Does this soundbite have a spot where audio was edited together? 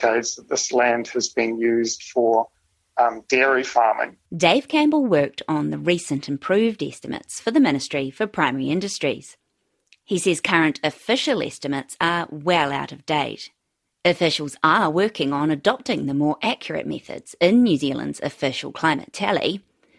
yes; 1 cut; at 4.3 s

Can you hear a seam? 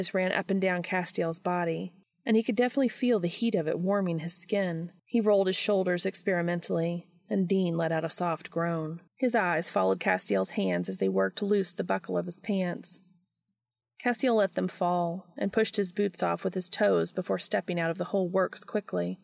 yes; 2 cuts; at 5.0 s, 9.1 s

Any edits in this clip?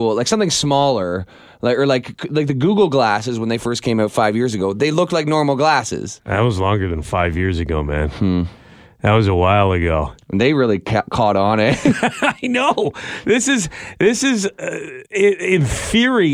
yes; 1 cut; at 15.1 s

